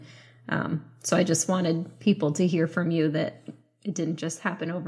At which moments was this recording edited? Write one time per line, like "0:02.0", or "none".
none